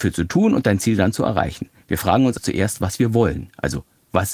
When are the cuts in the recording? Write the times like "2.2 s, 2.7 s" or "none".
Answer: 2.4 s